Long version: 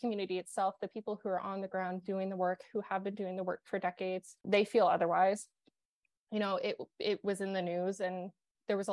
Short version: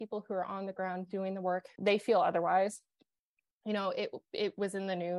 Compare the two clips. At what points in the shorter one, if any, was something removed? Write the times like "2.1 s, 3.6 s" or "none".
1.8 s